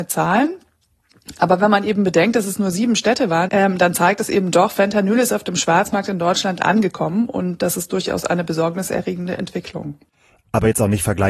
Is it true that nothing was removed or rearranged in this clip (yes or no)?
no